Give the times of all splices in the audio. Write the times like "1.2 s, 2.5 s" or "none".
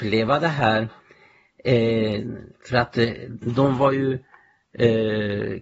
3.4 s